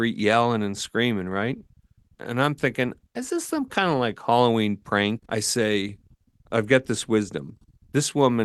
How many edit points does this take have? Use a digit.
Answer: 2